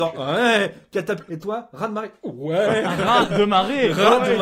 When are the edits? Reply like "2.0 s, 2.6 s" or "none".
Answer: 1.3 s